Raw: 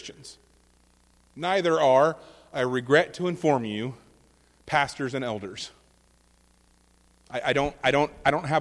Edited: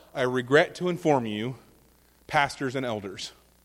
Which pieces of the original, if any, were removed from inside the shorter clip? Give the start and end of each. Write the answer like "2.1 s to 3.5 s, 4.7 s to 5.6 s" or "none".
none